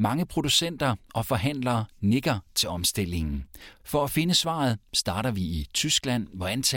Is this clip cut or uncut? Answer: cut